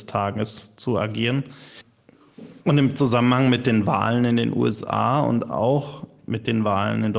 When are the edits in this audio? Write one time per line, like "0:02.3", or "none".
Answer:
0:02.6